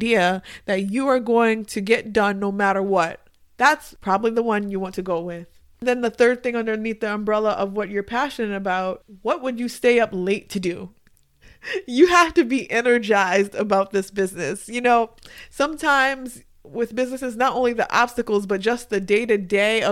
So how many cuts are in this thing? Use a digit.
0